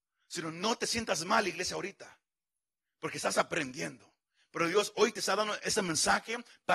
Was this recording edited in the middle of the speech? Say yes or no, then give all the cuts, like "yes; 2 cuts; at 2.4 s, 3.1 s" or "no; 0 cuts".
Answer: no; 0 cuts